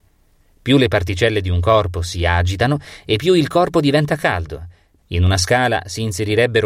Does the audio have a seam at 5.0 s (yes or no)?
yes